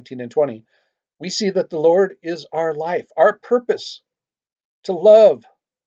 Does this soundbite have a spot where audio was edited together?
no; 0 cuts

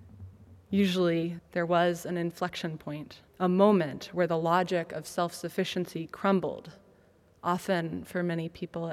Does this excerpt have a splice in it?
yes; 2 cuts; at 1.4 s, 3.3 s

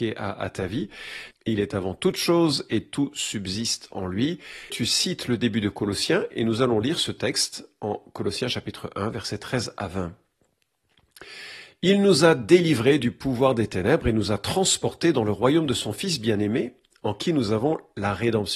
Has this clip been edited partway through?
yes; 2 cuts; at 1.3 s, 4.7 s

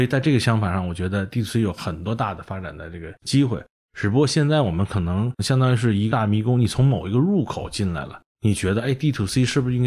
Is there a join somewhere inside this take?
no; 0 cuts

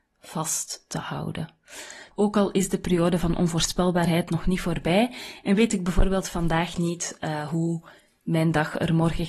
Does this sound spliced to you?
yes; 1 cut; at 2.1 s

